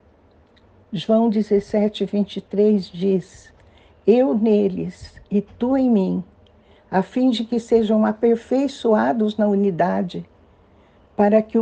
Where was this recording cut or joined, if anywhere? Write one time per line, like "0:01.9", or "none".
none